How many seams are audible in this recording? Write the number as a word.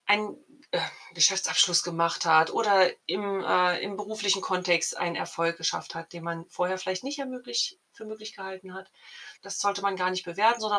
two